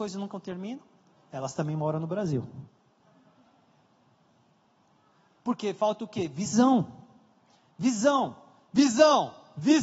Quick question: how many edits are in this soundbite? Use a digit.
0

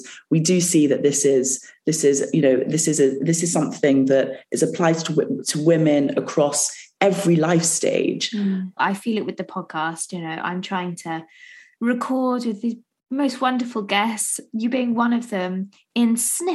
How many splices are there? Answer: 1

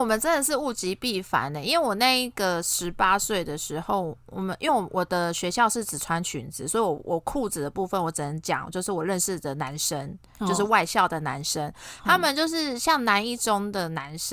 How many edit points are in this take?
0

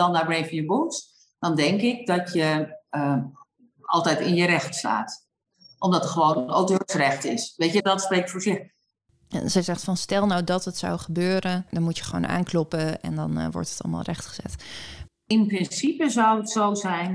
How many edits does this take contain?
2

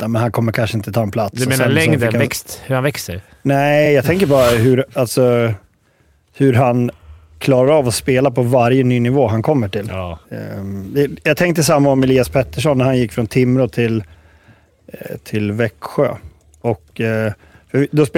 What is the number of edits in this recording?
0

